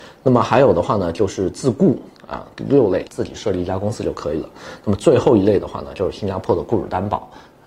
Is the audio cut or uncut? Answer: cut